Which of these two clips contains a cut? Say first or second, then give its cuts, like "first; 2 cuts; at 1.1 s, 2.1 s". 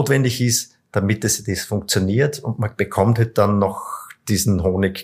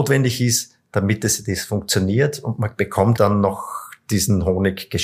second; 1 cut; at 3.2 s